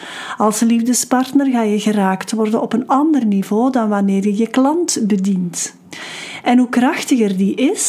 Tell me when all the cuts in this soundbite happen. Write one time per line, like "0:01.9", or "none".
0:06.4